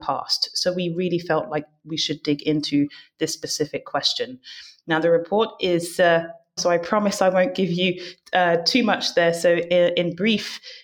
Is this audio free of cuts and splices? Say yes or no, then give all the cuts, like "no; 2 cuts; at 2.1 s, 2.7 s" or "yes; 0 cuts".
no; 1 cut; at 6.6 s